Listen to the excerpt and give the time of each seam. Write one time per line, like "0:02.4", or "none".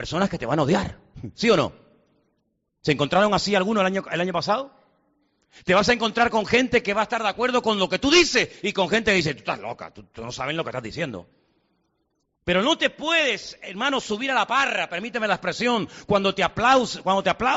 none

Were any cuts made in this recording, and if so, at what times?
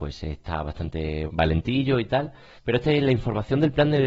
0:01.3
0:02.6

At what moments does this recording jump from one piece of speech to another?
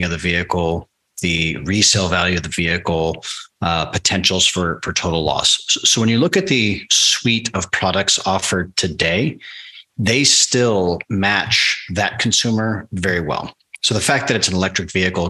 none

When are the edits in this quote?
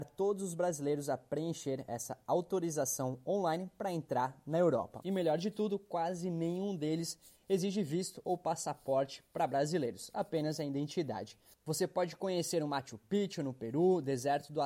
0:05.0

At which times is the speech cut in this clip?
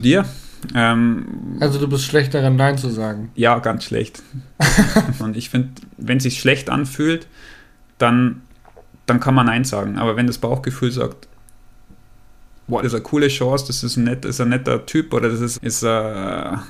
0:05.2
0:12.8
0:15.5

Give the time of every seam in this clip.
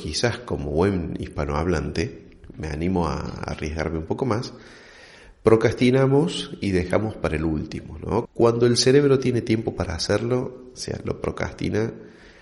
0:08.3
0:10.7

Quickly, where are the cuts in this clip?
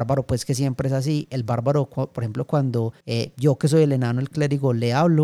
0:03.0

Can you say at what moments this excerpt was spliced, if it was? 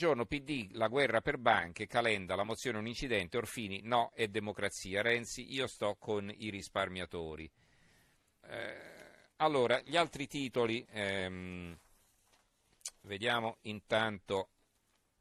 0:08.4
0:10.9

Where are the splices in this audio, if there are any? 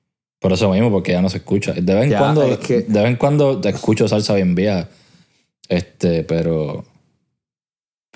none

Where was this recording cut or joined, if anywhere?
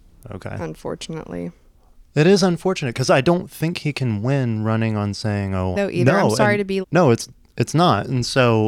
0:05.7
0:06.8

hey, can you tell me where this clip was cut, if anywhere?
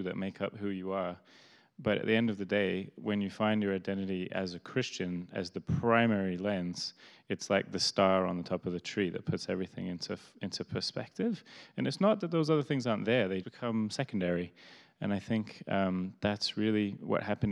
0:13.4

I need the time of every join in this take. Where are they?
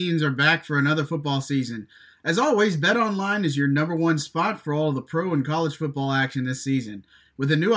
none

